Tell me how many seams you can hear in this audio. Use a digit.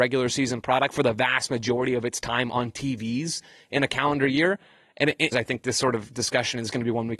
1